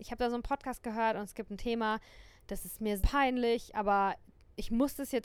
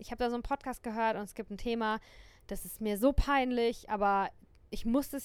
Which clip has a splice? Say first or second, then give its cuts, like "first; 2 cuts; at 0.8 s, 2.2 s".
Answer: first; 1 cut; at 3.0 s